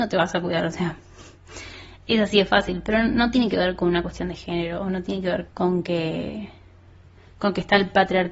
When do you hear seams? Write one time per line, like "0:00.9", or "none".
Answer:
0:05.5